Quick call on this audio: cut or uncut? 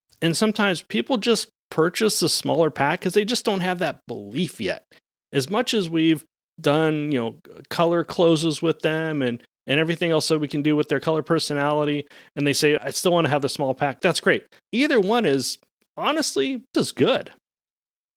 cut